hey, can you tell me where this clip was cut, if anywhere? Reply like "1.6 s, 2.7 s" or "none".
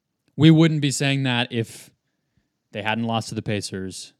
none